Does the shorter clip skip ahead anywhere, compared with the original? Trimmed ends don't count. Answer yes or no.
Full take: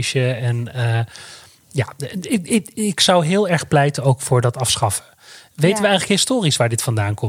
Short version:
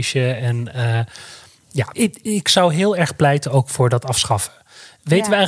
yes